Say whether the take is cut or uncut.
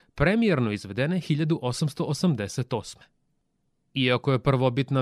uncut